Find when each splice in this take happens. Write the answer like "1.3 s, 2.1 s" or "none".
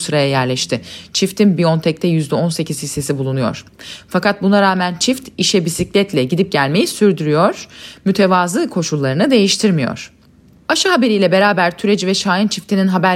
none